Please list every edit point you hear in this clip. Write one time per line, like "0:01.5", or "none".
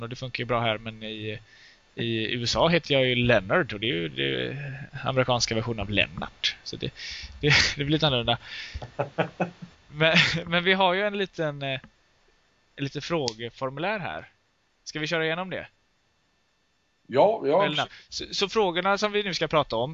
none